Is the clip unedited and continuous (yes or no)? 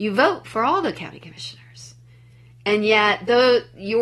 yes